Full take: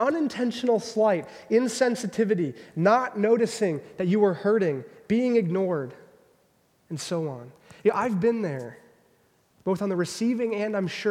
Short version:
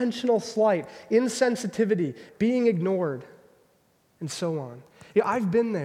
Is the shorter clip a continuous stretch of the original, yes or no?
no